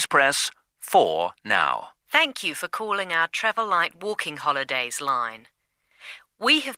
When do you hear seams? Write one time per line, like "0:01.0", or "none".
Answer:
0:02.0